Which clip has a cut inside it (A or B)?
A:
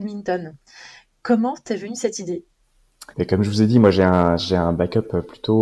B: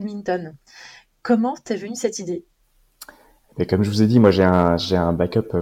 A